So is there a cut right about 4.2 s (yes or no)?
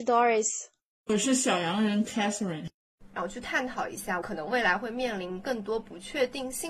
yes